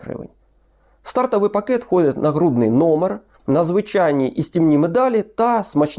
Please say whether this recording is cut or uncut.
cut